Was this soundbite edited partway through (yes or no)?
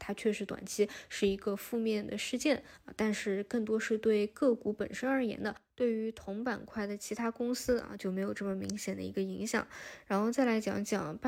no